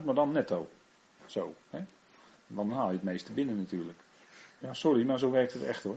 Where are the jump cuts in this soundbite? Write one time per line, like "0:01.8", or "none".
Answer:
0:01.2
0:04.5